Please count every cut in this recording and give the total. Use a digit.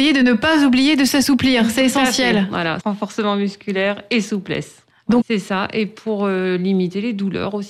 2